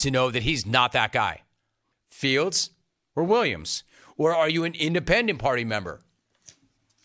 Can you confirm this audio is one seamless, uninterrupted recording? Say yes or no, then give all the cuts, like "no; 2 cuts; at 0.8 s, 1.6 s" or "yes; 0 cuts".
no; 1 cut; at 1.9 s